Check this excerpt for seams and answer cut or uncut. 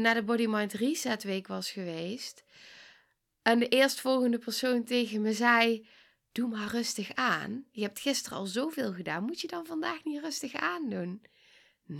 uncut